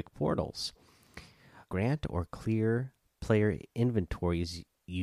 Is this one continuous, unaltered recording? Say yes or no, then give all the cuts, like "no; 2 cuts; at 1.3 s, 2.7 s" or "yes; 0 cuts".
no; 1 cut; at 1.7 s